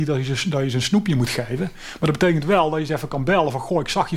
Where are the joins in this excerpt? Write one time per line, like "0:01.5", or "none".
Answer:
none